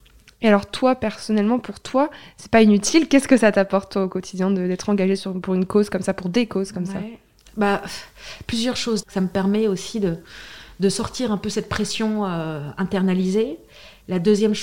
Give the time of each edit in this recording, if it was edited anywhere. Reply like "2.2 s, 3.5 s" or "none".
9.0 s